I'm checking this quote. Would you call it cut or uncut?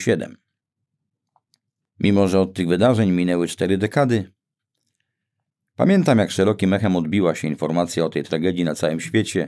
uncut